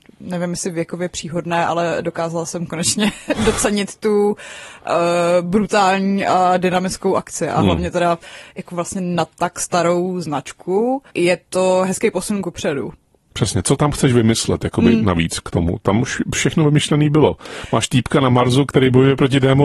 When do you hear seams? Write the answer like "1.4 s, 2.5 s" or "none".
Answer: 11.1 s